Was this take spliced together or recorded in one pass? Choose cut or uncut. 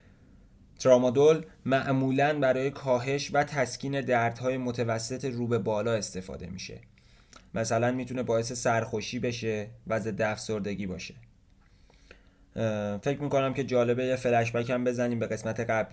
cut